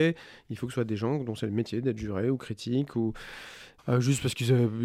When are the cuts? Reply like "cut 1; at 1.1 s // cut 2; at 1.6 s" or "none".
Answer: cut 1; at 3.8 s